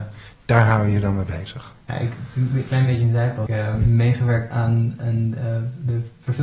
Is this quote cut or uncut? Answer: cut